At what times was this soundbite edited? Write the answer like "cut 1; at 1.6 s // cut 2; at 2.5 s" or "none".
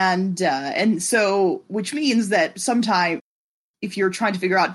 none